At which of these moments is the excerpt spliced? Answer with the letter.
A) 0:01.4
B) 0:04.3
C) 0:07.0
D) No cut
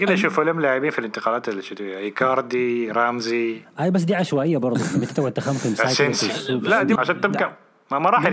C